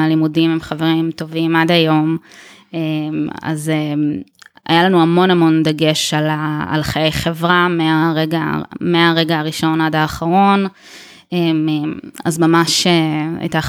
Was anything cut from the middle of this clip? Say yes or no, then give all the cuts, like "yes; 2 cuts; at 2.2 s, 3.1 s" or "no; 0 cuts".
no; 0 cuts